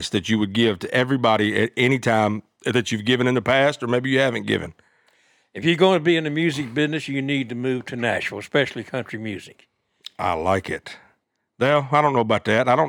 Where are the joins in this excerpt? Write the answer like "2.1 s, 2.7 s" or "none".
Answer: none